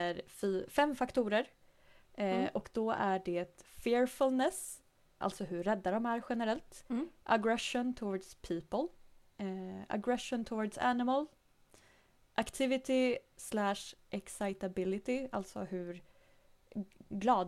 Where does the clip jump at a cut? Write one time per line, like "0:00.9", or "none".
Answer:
0:05.2

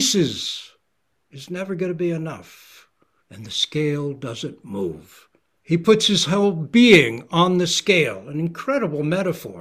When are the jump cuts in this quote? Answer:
0:03.2
0:05.6

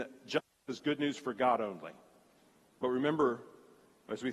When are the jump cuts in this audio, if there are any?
0:02.6

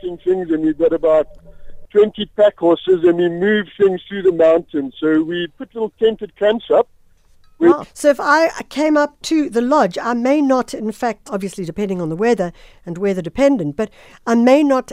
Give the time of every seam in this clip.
0:07.8
0:11.3

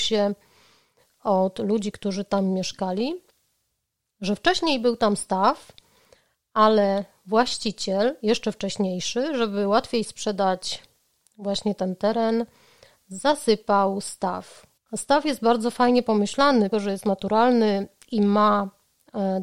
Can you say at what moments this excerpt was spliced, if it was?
0:14.8
0:16.7

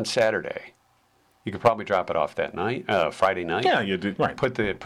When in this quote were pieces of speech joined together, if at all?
none

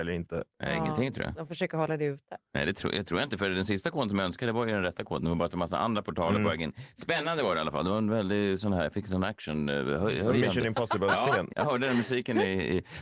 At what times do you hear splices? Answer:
0:11.5

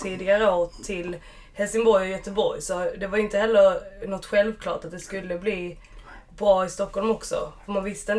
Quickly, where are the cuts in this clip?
none

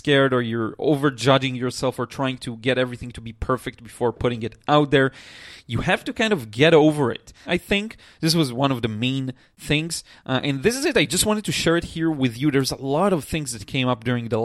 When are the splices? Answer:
0:07.5

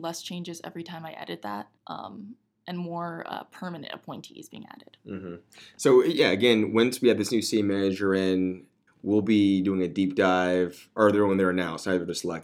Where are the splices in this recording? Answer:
0:01.8
0:08.9

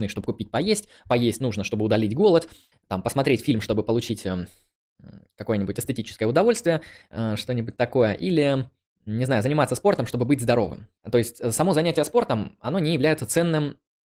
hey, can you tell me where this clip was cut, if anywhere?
0:02.7
0:11.0

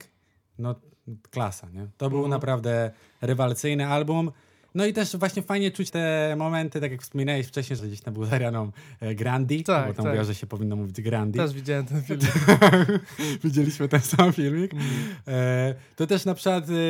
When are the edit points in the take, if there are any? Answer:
0:05.9
0:07.8

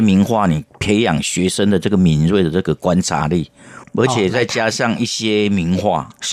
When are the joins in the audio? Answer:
0:03.8

